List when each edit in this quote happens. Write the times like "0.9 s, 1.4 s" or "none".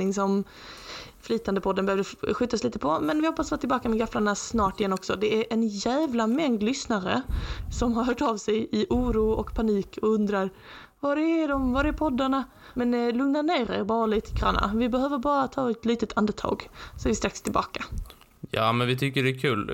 12.7 s